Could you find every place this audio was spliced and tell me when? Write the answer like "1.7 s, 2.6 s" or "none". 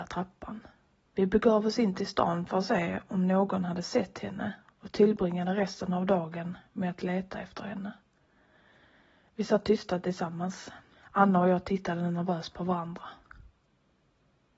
1.0 s, 10.9 s